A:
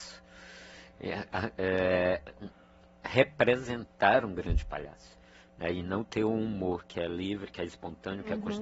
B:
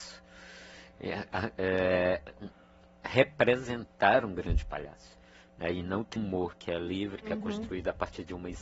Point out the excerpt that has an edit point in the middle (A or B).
B